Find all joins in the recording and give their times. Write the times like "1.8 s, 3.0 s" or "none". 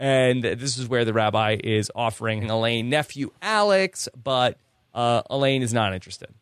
none

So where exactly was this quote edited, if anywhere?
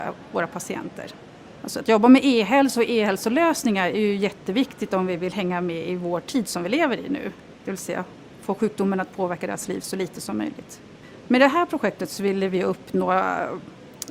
7.5 s

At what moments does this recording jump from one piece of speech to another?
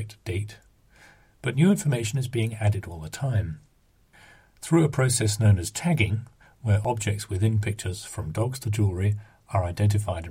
none

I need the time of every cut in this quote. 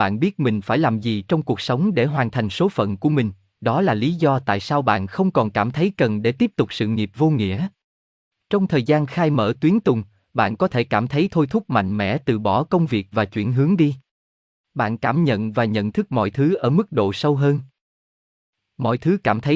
none

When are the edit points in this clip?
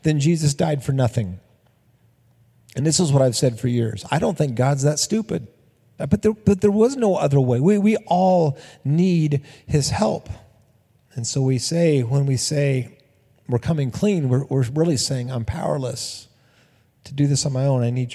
6.0 s

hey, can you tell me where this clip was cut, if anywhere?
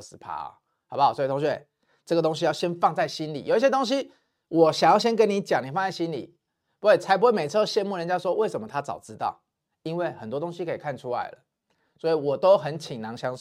none

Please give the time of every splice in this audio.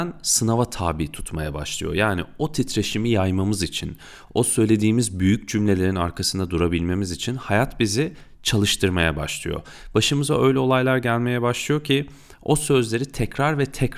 4.3 s

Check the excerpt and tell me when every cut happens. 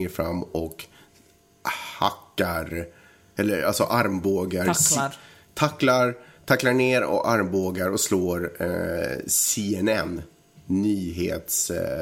none

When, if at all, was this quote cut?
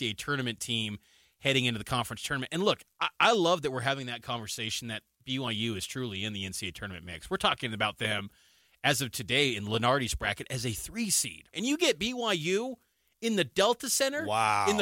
11.5 s

